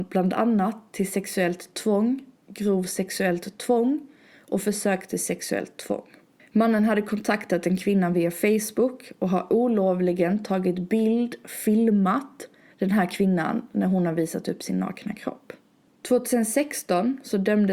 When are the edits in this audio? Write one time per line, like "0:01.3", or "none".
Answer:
0:15.9